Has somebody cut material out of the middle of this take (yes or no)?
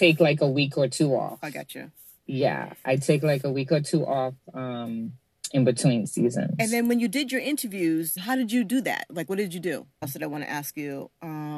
yes